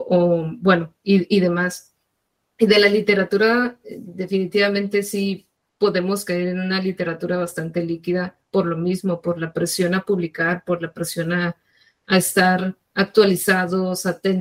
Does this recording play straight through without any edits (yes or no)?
yes